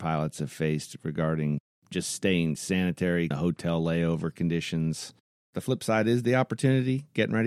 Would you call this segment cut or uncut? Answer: cut